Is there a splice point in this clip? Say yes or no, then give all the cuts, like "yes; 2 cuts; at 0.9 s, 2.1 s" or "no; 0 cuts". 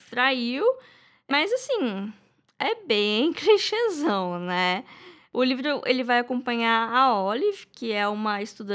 no; 0 cuts